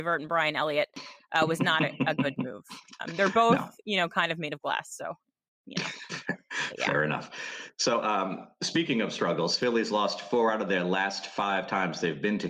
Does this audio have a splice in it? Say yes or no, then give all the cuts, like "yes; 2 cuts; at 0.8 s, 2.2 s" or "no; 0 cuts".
no; 0 cuts